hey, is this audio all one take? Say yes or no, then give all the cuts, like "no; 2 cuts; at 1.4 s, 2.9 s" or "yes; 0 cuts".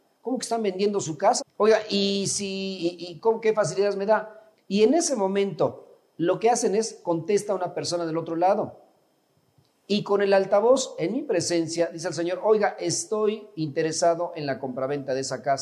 no; 2 cuts; at 1.4 s, 4.5 s